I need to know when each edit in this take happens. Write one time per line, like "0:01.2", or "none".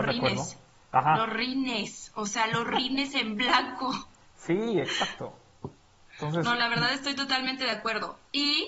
none